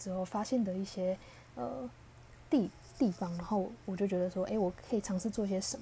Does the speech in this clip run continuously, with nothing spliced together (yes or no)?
yes